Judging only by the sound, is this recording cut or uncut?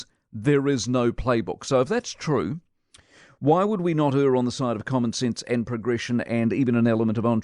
uncut